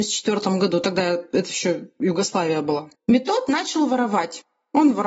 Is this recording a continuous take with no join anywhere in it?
no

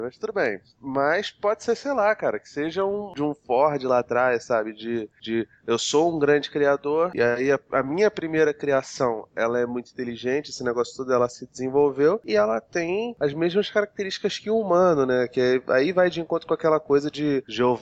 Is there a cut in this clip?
yes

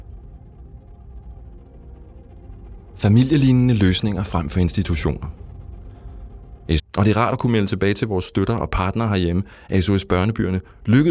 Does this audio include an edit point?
yes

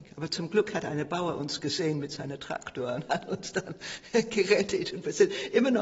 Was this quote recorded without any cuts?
yes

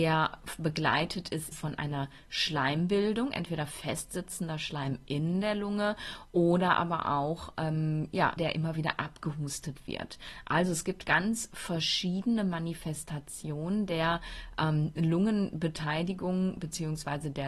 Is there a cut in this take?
yes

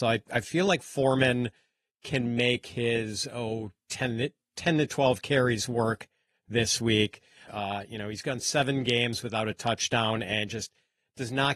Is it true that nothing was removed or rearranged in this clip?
no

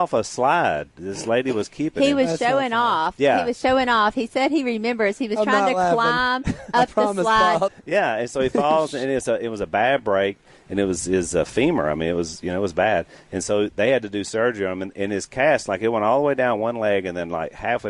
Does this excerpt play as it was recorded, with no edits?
no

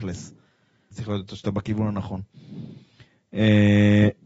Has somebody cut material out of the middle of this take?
yes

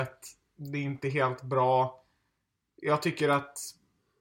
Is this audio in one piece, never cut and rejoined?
yes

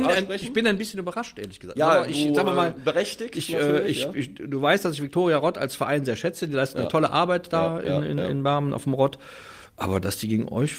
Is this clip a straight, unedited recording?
yes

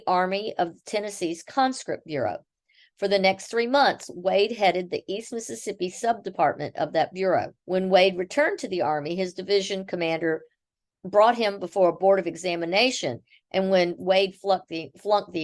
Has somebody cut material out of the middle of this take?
yes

